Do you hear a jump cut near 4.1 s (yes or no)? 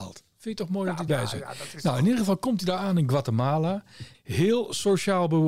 yes